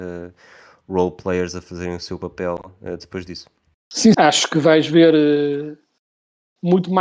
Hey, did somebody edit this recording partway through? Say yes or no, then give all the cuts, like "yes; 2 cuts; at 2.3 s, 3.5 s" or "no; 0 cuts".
yes; 1 cut; at 4.1 s